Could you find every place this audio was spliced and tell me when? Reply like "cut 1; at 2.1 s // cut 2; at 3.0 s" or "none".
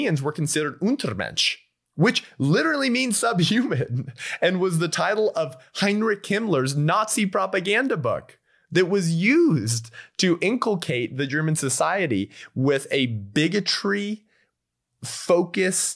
none